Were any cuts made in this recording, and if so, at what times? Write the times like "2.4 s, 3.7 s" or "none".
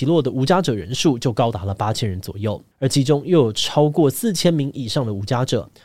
2.7 s